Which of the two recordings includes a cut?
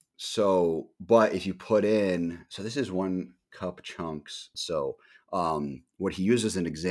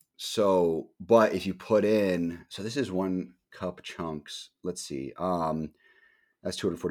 first; 1 cut; at 4.5 s

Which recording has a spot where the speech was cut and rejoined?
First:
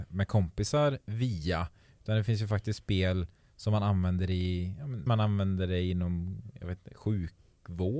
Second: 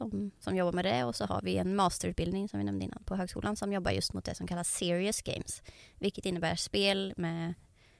first; 1 cut; at 5.1 s

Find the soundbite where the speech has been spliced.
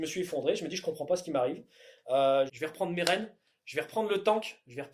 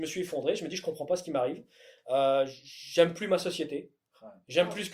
first; 1 cut; at 2.5 s

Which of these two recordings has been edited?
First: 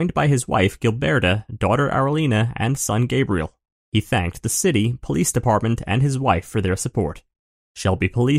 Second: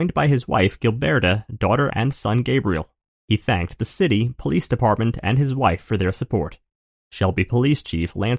second; 1 cut; at 1.9 s

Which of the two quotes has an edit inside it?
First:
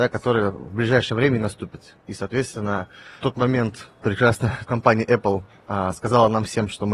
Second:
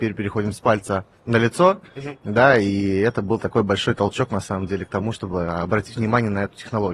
first; 2 cuts; at 3.2 s, 4.7 s

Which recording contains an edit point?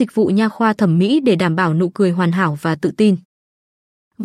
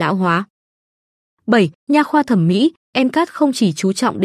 second; 1 cut; at 1.8 s

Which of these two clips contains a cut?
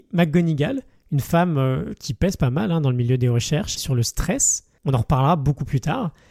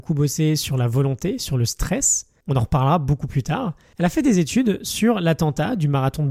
first; 1 cut; at 3.8 s

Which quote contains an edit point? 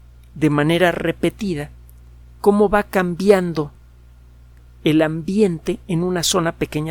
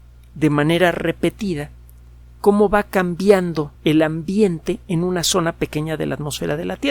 second; 1 cut; at 3.7 s

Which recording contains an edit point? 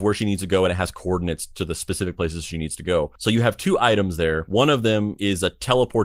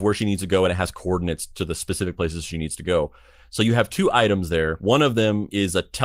first; 1 cut; at 3.2 s

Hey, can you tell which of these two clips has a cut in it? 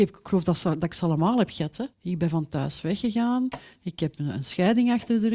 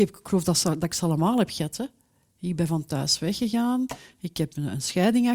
first; 1 cut; at 1.9 s

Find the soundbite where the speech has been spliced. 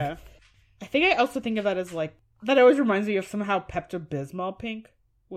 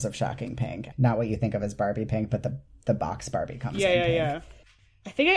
second; 1 cut; at 0.9 s

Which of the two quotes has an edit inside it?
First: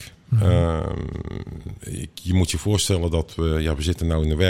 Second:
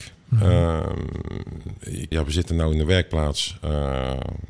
second; 1 cut; at 2.1 s

